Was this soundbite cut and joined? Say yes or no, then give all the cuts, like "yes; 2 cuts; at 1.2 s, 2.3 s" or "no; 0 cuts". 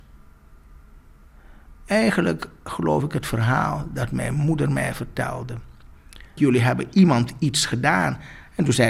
yes; 1 cut; at 6.4 s